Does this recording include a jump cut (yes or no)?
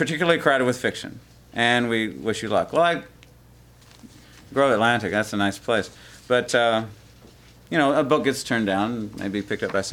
no